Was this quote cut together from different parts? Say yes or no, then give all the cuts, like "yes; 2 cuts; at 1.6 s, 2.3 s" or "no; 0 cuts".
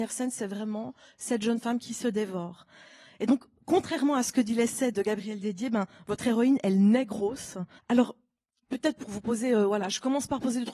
yes; 1 cut; at 7.8 s